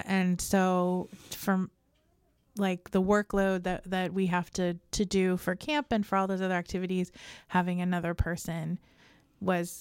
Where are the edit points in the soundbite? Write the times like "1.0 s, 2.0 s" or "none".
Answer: none